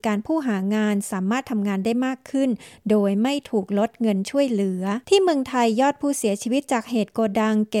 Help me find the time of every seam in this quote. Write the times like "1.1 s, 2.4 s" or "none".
5.0 s